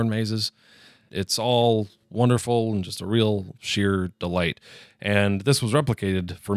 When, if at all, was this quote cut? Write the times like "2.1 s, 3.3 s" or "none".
1.1 s